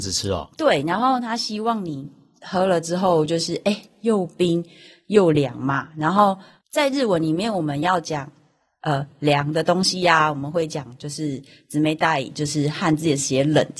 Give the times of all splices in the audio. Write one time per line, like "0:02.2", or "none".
none